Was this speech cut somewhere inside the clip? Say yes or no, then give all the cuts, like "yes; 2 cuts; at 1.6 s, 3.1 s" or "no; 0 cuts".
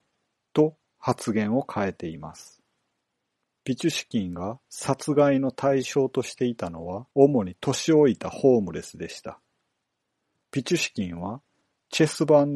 yes; 3 cuts; at 3.6 s, 7.1 s, 10.4 s